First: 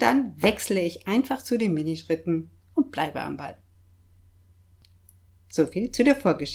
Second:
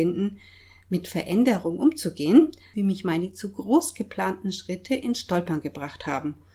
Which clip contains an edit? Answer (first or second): second